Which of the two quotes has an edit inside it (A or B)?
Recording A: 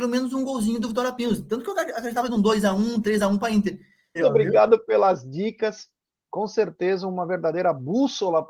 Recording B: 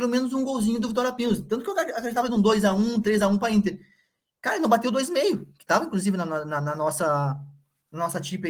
A